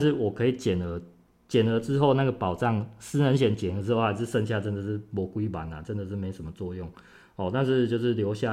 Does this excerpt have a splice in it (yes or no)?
no